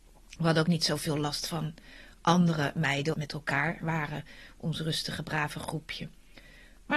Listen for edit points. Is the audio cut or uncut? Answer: cut